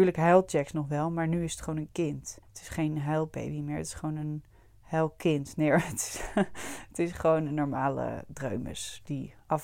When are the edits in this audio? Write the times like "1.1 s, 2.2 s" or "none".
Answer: 2.4 s